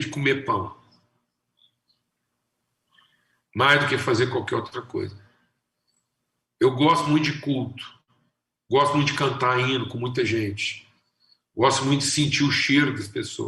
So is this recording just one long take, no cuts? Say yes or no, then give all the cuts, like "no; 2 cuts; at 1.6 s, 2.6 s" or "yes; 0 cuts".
yes; 0 cuts